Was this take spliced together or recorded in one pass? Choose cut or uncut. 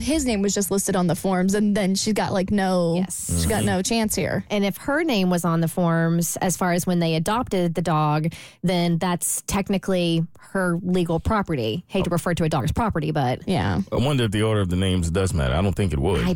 uncut